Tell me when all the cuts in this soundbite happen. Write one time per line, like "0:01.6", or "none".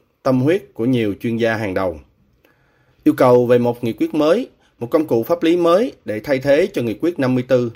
0:02.9